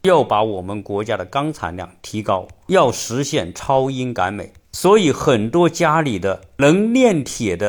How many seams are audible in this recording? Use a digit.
0